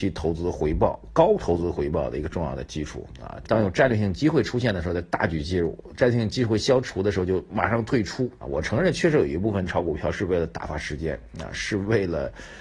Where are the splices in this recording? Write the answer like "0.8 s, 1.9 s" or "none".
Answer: 3.4 s, 8.4 s